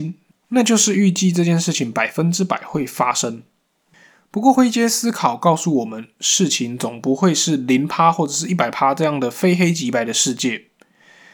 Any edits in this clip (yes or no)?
no